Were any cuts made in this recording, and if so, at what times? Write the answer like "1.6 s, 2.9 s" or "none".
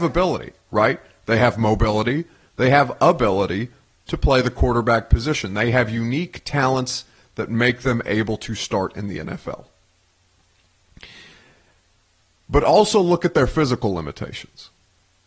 none